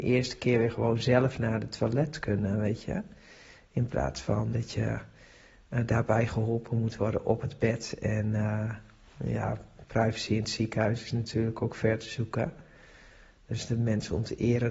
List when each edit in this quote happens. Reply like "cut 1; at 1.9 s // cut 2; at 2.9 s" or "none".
cut 1; at 4.5 s